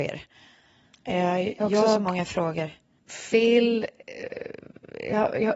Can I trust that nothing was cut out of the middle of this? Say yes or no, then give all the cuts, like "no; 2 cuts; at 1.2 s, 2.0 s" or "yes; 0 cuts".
no; 1 cut; at 3.0 s